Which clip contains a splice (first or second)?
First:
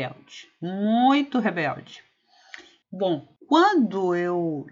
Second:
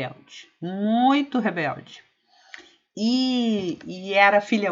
first